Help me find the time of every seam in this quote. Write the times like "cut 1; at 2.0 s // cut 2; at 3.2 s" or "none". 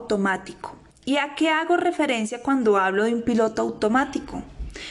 none